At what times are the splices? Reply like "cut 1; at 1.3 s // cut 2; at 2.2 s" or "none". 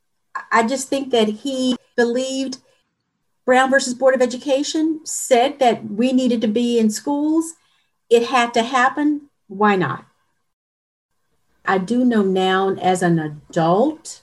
cut 1; at 9.3 s